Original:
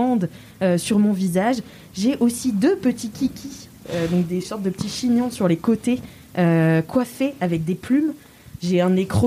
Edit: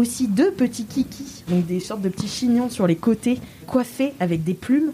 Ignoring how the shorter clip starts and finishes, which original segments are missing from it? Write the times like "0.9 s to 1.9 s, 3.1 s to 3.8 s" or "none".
3.7 s to 4.1 s, 6.2 s to 6.8 s